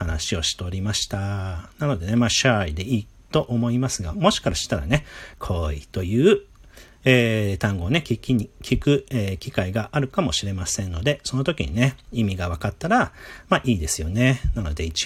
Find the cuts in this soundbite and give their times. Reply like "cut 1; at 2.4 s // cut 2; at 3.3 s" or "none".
none